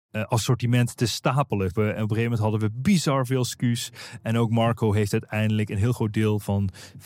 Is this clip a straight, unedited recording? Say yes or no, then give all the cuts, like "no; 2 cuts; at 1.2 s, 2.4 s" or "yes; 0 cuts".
no; 1 cut; at 1.8 s